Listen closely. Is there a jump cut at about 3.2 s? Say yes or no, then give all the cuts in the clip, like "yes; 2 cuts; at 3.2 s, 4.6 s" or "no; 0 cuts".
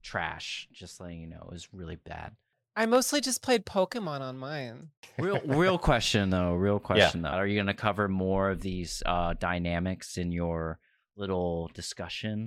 no; 1 cut; at 7.3 s